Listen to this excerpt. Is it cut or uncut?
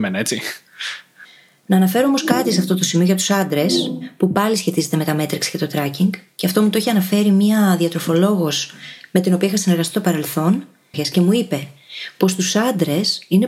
cut